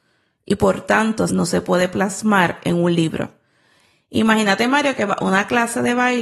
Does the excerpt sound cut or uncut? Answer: cut